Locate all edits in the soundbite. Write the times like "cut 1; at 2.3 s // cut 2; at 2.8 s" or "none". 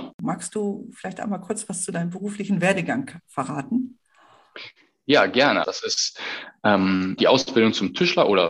cut 1; at 5.6 s // cut 2; at 7.2 s